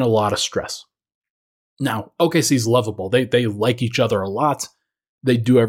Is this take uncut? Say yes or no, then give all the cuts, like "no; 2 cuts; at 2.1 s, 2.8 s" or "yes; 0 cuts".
yes; 0 cuts